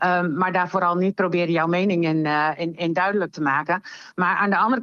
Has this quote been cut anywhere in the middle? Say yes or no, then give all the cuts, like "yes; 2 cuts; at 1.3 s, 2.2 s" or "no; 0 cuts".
no; 0 cuts